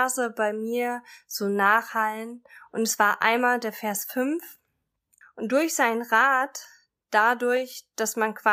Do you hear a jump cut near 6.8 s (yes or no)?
no